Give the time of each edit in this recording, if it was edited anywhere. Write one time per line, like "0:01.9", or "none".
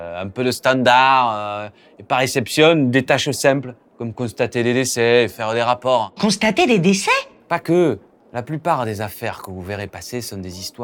none

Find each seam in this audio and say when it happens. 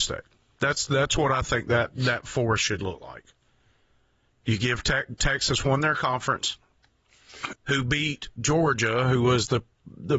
0:07.5

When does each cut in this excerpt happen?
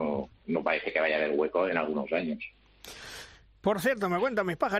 0:01.7

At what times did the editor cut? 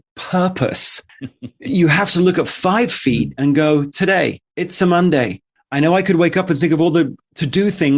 0:04.5

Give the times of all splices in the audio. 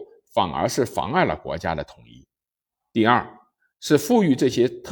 none

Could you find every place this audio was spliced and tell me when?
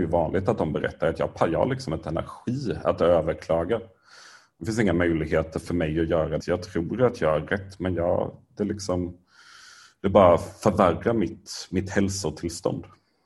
0:06.4

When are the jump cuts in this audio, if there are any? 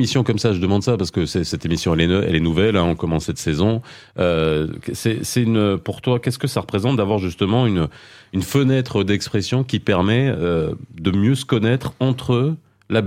none

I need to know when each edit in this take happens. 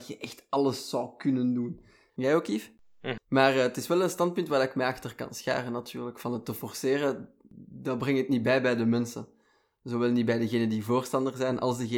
0:02.1
0:03.2

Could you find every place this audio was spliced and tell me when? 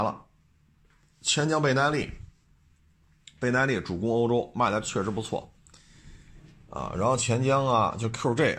none

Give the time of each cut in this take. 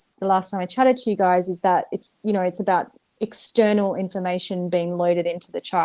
none

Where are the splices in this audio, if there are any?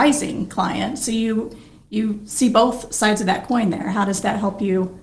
none

